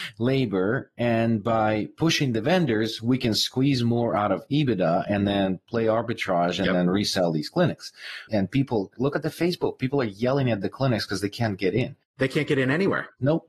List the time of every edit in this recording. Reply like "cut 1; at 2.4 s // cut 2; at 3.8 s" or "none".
cut 1; at 8.3 s

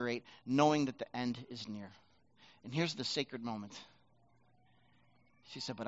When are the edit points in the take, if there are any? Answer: none

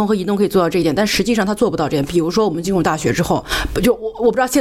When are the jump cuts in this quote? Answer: none

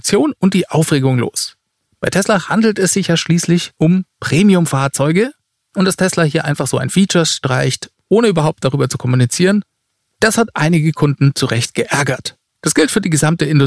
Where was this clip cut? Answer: cut 1; at 12.5 s

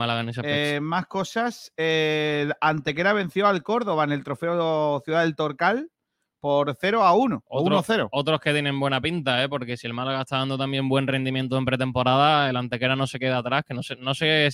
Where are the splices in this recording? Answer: none

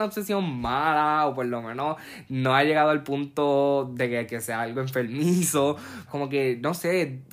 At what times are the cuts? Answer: cut 1; at 6.1 s

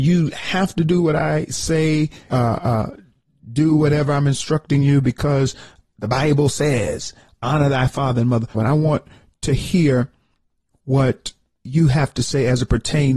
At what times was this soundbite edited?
cut 1; at 2.3 s // cut 2; at 8.5 s

